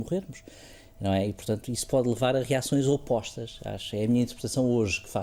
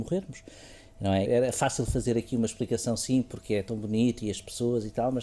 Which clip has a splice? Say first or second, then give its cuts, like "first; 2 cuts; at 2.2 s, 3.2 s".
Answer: second; 1 cut; at 1.3 s